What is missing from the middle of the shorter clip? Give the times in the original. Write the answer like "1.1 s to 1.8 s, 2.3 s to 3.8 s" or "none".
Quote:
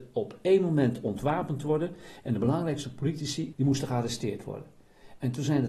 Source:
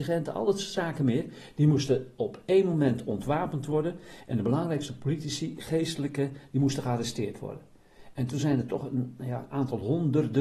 5.6 s to 6.5 s